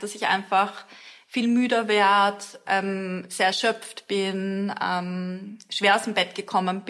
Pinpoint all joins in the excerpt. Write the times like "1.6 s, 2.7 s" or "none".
none